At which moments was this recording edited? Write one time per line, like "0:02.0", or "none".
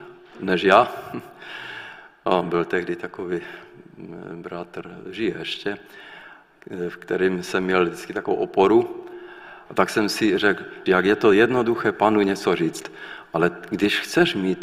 0:09.7
0:10.9